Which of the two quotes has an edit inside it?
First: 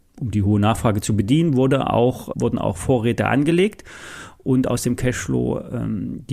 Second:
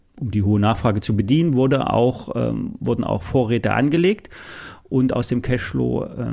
first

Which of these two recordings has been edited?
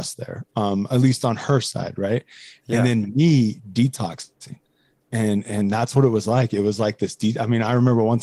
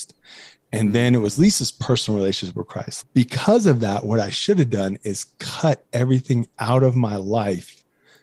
second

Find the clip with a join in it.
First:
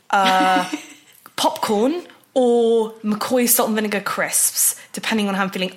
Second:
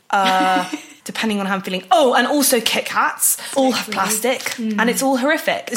second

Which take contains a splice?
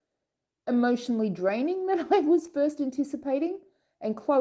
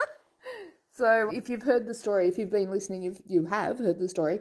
second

